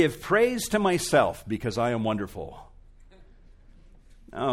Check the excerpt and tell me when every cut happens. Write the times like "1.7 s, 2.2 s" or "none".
none